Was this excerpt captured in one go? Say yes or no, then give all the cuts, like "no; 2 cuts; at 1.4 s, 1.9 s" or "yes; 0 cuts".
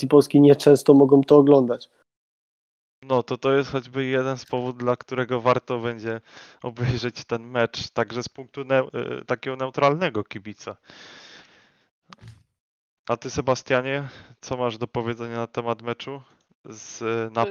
yes; 0 cuts